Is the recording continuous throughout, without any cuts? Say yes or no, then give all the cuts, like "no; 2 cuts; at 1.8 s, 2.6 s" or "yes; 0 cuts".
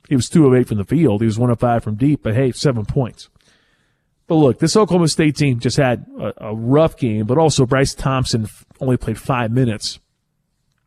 yes; 0 cuts